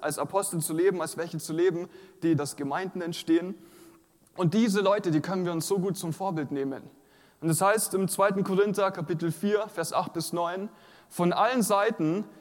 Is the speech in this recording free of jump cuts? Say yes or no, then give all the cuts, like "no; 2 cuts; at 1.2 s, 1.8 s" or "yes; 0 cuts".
no; 1 cut; at 2.4 s